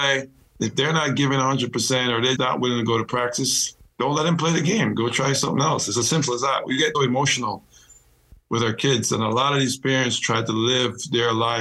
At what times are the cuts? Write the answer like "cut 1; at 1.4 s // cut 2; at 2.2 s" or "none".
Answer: cut 1; at 2.4 s // cut 2; at 6.9 s